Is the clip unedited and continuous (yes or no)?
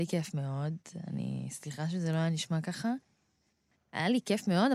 yes